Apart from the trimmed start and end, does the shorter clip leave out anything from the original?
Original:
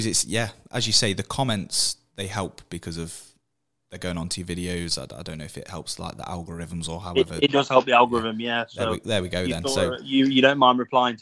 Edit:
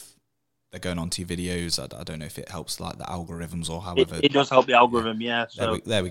no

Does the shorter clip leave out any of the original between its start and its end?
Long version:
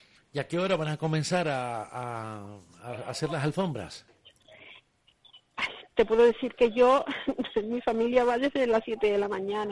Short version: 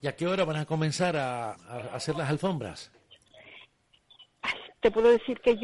yes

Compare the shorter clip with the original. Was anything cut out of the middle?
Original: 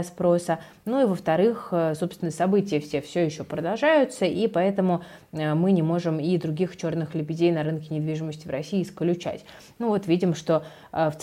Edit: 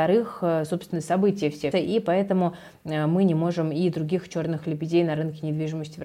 yes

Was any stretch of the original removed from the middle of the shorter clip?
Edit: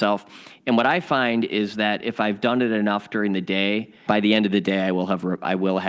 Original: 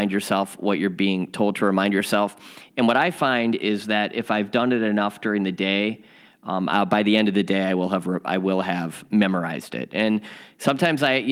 yes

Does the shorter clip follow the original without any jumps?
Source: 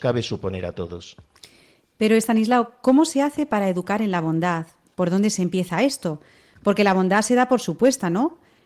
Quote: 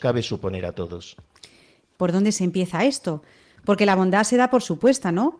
no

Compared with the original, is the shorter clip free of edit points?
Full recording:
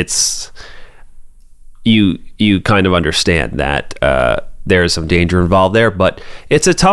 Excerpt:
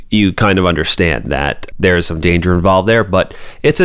no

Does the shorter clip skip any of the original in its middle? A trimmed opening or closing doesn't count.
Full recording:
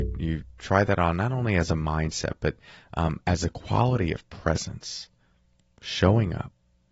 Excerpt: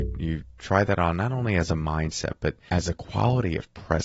yes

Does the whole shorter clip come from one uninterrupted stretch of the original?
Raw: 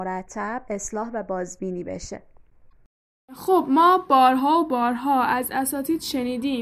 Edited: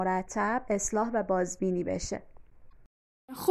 yes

